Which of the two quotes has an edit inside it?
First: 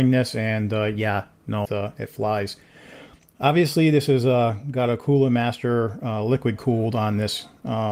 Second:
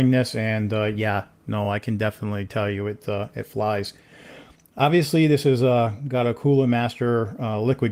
first; 1 cut; at 1.6 s

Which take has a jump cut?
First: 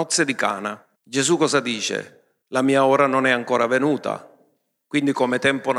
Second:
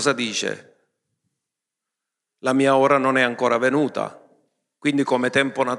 first; 2 cuts; at 0.9 s, 2.4 s

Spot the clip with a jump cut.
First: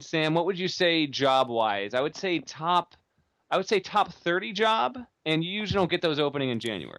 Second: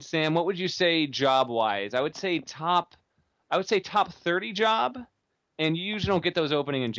first; 1 cut; at 5.1 s

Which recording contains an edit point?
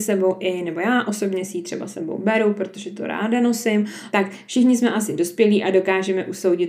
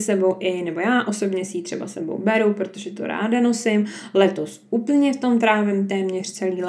first; 1 cut; at 4.1 s

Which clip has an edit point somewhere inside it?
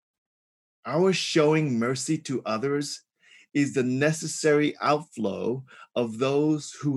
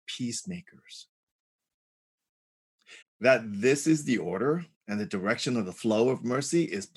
second; 2 cuts; at 3.0 s, 4.7 s

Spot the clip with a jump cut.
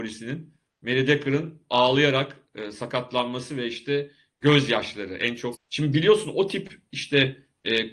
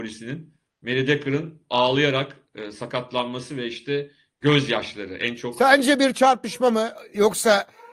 first; 1 cut; at 5.5 s

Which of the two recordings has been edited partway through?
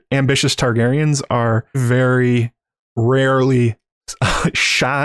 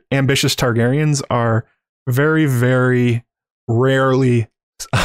first; 1 cut; at 1.7 s

